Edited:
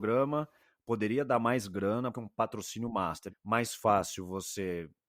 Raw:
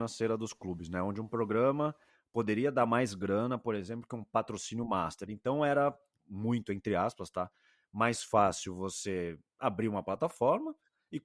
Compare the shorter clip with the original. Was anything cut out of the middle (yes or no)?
yes